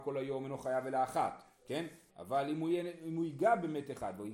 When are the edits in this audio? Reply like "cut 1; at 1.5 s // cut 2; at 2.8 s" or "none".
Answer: cut 1; at 2.1 s